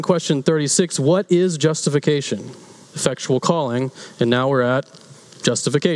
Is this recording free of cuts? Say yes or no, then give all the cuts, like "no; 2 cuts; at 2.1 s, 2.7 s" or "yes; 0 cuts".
no; 1 cut; at 2.9 s